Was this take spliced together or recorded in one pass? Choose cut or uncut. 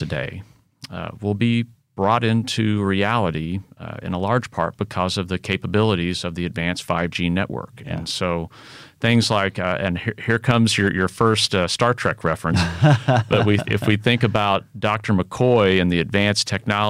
uncut